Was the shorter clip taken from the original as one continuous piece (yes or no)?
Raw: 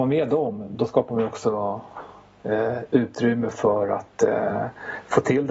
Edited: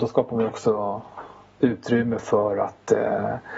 no